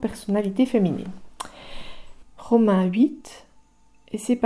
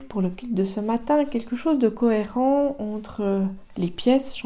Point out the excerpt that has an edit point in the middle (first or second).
first